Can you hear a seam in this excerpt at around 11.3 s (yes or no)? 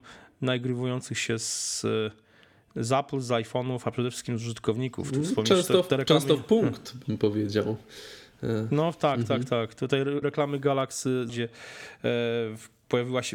yes